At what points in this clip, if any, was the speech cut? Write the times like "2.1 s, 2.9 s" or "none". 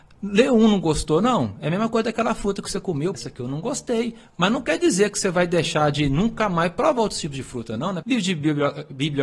3.1 s, 8.0 s